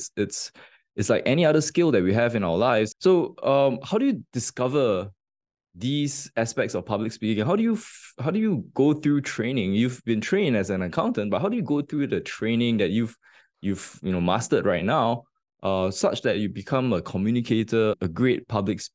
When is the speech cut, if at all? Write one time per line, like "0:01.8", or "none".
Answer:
0:02.9
0:17.9